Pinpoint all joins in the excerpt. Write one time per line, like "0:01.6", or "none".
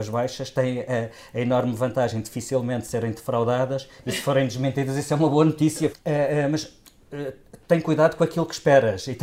0:05.9